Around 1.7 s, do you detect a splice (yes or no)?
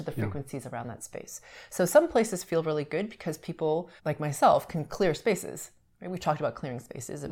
no